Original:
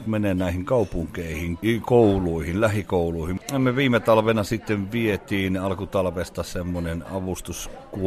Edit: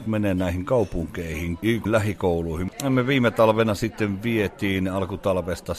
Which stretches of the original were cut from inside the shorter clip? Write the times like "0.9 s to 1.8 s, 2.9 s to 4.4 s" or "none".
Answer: 1.9 s to 2.5 s